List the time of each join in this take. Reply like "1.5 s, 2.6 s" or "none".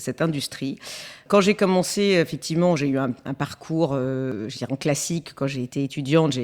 none